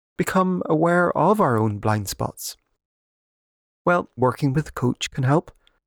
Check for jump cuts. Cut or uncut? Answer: cut